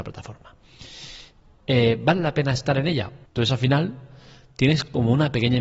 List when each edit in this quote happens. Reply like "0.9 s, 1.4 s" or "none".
3.3 s

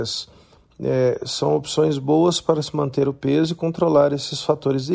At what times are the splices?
none

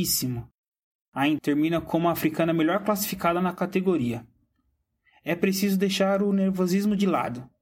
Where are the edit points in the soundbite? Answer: 1.4 s

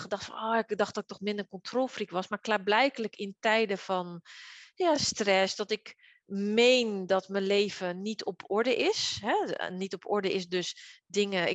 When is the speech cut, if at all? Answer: none

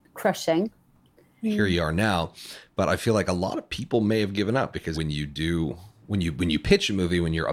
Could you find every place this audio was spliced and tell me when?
1.4 s, 4.9 s

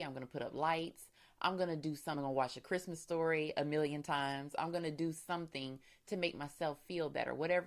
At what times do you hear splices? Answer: none

